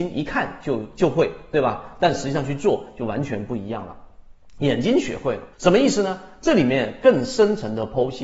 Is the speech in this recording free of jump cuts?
no; 1 cut; at 5.5 s

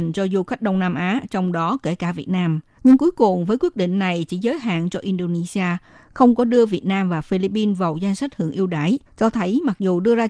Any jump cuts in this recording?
yes; 2 cuts; at 2.8 s, 9.1 s

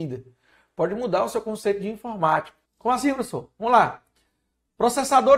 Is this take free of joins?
no; 1 cut; at 2.6 s

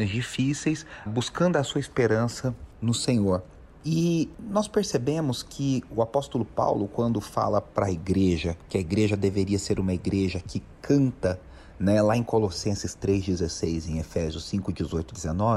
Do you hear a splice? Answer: yes; 1 cut; at 1.1 s

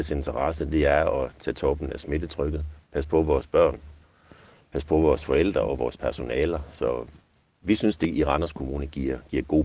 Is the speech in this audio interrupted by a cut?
no; 0 cuts

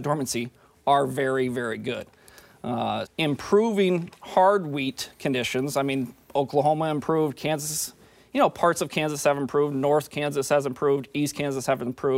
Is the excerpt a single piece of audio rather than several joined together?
no; 1 cut; at 3.1 s

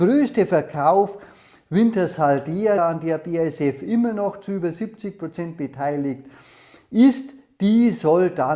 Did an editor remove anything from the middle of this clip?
yes; 1 cut; at 2.8 s

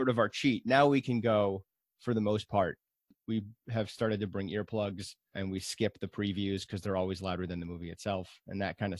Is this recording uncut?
no; 1 cut; at 5.3 s

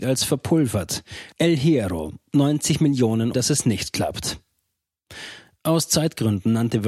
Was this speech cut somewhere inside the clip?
yes; 2 cuts; at 1.3 s, 3.3 s

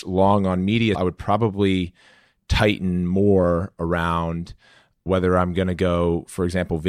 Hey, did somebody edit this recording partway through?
yes; 1 cut; at 0.9 s

